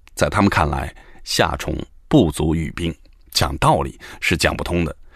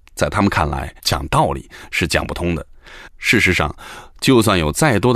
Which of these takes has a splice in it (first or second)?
second